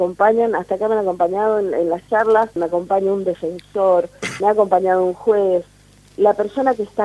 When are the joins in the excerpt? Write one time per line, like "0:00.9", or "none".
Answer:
0:02.6
0:04.4